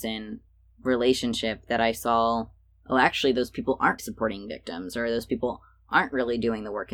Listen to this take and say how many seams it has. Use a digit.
1